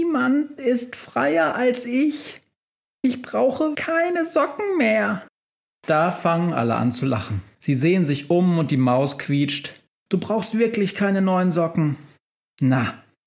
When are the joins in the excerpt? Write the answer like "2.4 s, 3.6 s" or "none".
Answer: 3.7 s, 10.1 s